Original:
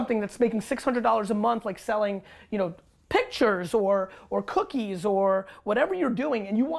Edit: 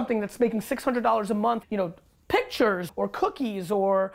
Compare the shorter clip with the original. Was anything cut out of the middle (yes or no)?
yes